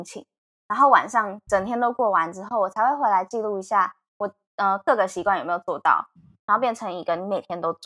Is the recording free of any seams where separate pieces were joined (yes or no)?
no